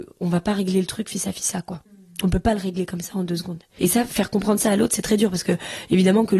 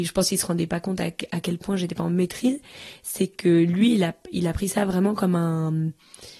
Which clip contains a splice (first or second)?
first